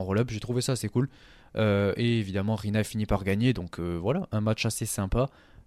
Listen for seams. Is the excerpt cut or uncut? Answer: uncut